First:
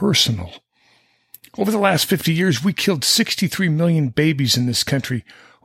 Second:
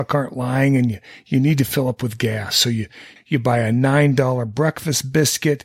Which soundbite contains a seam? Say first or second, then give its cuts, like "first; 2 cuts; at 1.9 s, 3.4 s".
second; 1 cut; at 3.2 s